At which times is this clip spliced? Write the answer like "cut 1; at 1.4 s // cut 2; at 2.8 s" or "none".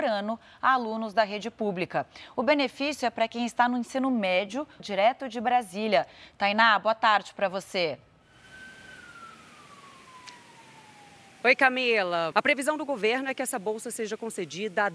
cut 1; at 4.8 s // cut 2; at 12.3 s

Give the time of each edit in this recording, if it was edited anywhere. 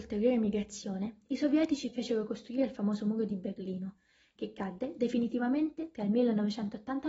none

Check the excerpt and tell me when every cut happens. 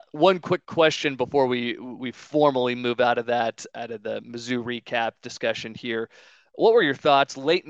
cut 1; at 3.7 s

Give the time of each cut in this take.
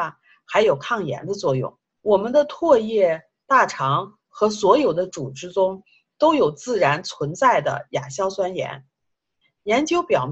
cut 1; at 1.9 s

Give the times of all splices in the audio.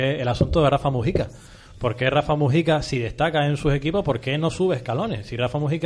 none

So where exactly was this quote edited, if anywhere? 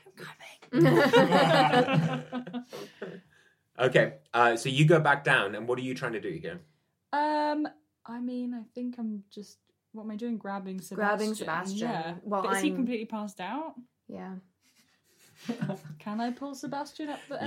none

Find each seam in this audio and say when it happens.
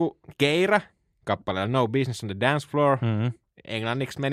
none

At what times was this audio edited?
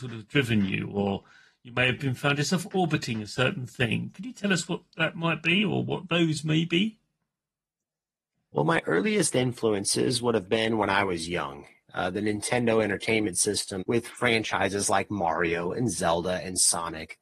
cut 1; at 13.8 s

